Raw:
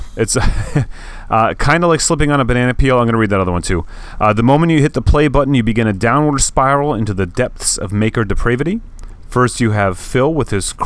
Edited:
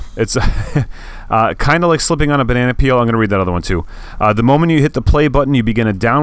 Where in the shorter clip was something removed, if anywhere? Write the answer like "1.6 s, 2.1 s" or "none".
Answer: none

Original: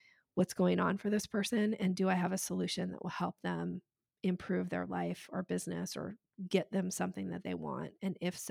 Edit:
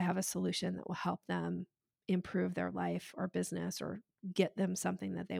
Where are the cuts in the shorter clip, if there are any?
none

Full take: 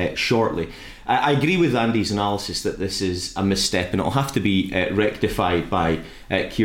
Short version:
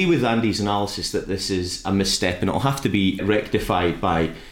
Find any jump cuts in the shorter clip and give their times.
3.2 s

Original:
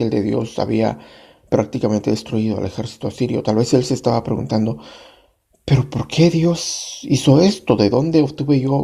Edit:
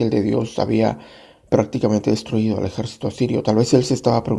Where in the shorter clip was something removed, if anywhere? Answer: none

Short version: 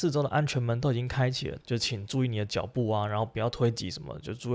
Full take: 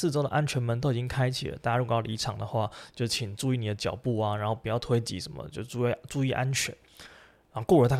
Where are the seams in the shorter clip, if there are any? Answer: 1.6 s

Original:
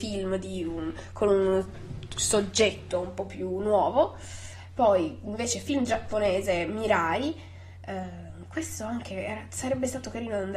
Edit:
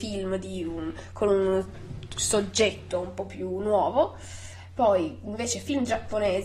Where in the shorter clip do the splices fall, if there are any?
none

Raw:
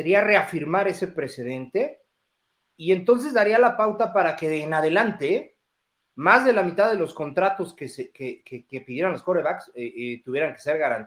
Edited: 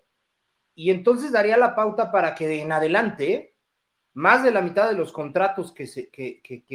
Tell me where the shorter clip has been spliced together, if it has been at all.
none

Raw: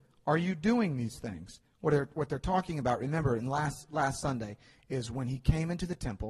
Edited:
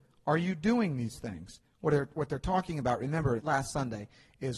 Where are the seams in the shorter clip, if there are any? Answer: 3.4 s

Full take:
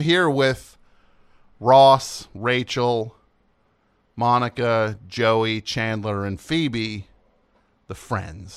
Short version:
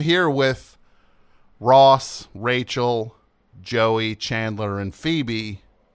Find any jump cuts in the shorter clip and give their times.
3.5 s

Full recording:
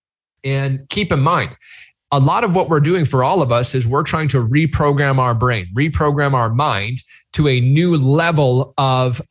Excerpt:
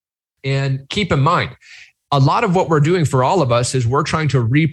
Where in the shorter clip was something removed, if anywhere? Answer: none

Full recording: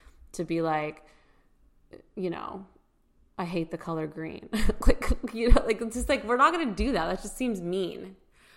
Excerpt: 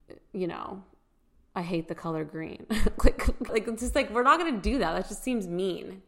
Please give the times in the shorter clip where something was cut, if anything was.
3.5 s

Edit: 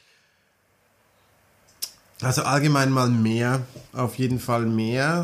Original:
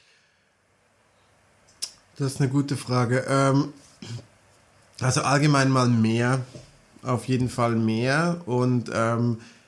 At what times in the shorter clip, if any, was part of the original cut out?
2.0 s, 3.9 s

